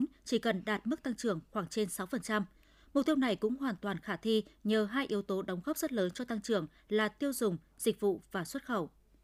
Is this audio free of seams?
yes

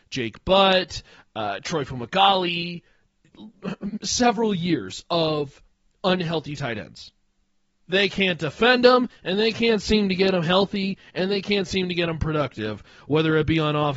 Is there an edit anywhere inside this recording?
yes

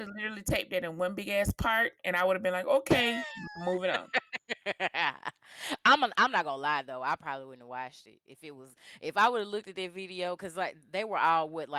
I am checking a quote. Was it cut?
no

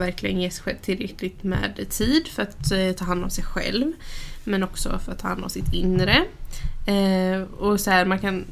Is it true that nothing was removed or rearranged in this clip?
yes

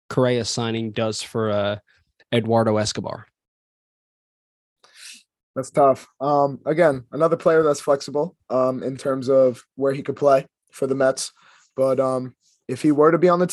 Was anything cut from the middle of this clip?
no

